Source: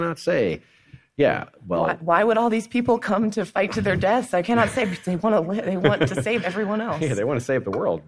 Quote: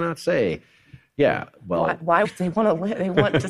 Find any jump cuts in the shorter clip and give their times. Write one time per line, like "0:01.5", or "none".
0:02.2